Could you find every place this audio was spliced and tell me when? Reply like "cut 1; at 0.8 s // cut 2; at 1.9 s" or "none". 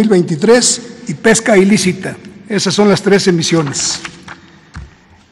none